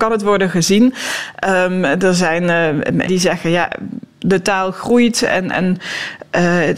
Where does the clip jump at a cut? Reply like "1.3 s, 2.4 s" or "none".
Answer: 3.1 s